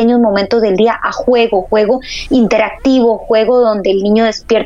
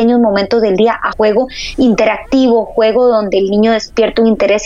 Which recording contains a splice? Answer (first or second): second